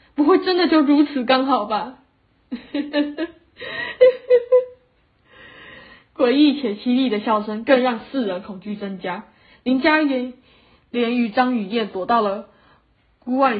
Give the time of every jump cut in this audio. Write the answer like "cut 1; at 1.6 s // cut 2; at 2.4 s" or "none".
none